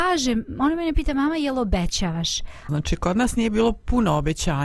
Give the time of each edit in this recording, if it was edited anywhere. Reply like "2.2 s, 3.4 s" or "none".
2.7 s